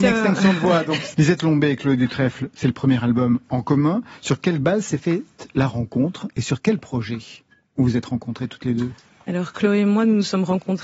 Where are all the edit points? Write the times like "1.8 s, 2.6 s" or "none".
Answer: 1.1 s